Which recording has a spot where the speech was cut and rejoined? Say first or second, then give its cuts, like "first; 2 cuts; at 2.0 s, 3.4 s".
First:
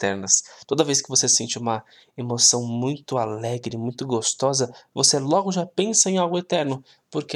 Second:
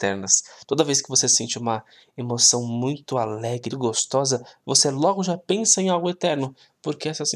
second; 1 cut; at 3.7 s